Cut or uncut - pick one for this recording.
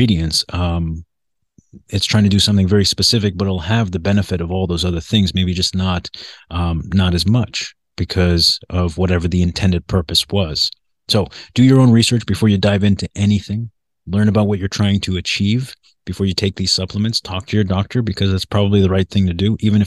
uncut